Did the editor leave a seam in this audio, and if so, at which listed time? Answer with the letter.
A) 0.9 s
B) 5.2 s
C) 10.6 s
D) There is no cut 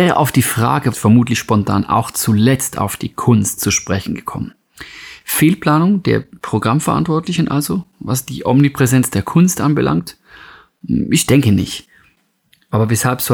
A